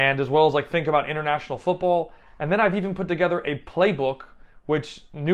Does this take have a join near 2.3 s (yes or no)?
no